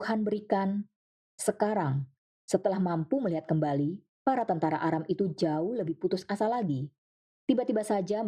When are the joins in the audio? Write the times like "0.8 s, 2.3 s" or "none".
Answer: none